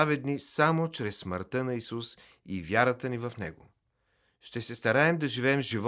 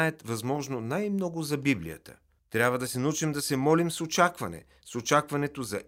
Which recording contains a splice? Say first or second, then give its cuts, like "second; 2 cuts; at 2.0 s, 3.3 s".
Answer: second; 1 cut; at 2.4 s